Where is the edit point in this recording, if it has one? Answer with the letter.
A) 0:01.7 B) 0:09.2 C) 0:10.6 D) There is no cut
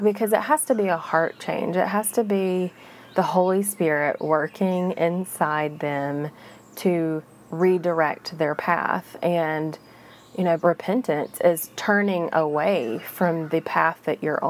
C